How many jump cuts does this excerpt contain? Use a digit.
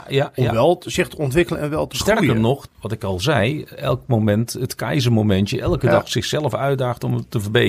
1